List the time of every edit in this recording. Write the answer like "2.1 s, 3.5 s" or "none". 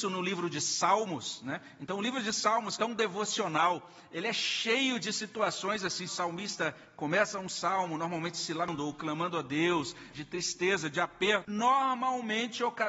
2.8 s, 6.1 s, 10.1 s